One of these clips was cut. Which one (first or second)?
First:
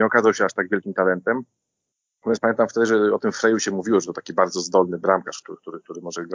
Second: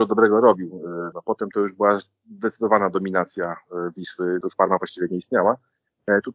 second